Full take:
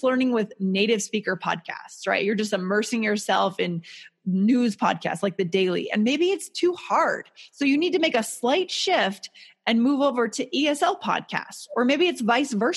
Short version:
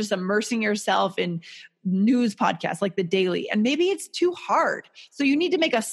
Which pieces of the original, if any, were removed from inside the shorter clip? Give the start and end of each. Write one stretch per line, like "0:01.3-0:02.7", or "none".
none